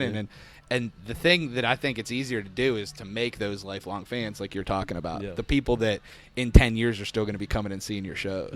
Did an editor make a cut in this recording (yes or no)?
no